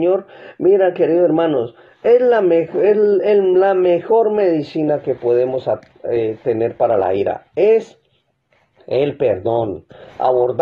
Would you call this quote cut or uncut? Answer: uncut